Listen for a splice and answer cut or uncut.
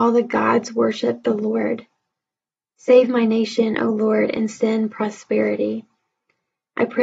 cut